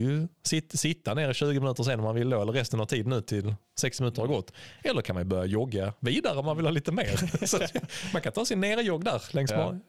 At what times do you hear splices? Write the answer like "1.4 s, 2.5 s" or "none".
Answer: none